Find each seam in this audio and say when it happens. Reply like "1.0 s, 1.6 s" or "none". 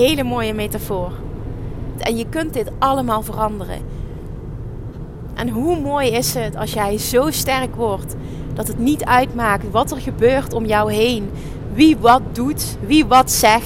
2.0 s